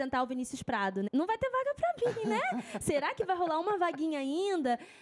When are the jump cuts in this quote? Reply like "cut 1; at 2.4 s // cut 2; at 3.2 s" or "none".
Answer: cut 1; at 1.1 s